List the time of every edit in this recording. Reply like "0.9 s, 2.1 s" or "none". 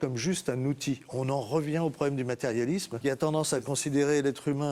3.0 s